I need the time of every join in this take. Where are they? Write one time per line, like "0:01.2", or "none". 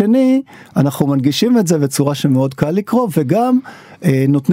none